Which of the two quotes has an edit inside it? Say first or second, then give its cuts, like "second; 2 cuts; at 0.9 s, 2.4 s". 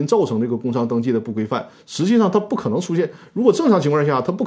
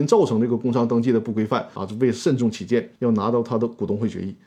second; 2 cuts; at 1.8 s, 3.0 s